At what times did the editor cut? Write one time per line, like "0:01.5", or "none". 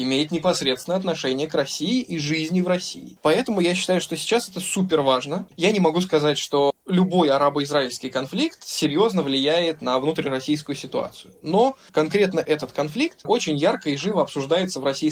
0:05.5